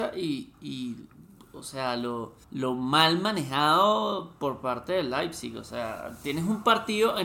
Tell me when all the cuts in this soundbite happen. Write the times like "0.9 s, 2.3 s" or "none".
2.4 s